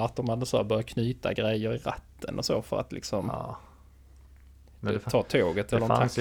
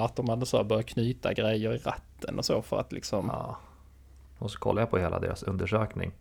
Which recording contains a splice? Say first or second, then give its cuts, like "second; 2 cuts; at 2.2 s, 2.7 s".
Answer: second; 1 cut; at 4.4 s